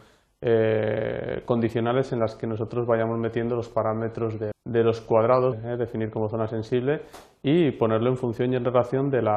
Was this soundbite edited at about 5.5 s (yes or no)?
yes